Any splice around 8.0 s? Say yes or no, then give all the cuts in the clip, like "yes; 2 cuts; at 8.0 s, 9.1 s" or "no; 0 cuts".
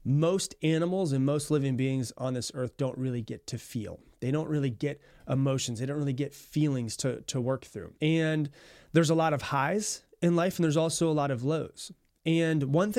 yes; 1 cut; at 8.0 s